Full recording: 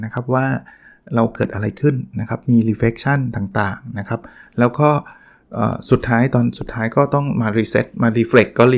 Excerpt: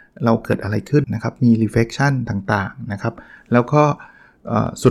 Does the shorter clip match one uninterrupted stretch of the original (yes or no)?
no